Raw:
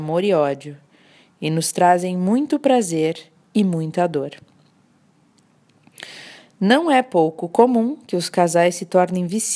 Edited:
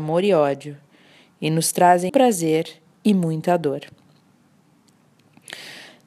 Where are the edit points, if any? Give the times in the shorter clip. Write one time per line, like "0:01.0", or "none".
0:02.1